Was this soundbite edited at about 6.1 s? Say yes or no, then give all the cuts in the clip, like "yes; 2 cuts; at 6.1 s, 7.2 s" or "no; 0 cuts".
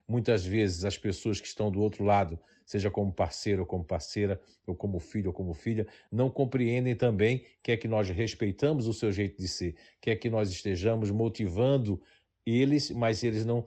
no; 0 cuts